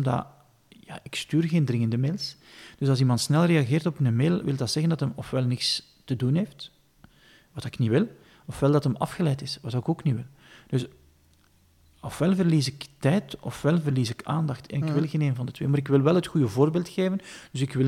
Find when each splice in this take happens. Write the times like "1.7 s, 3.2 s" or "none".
none